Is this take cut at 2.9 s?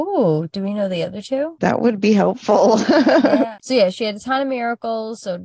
no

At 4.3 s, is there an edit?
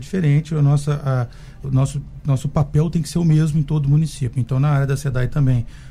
no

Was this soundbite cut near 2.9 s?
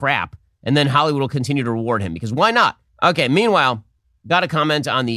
yes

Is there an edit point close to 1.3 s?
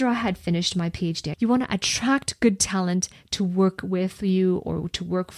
yes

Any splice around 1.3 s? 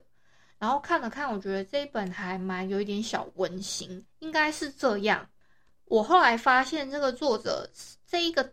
no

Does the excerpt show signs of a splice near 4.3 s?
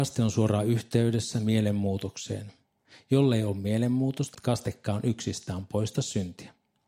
yes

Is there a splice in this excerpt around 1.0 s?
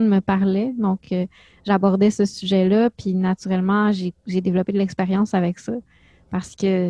no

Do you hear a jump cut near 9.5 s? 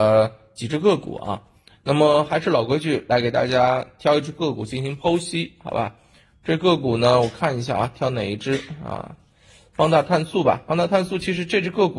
no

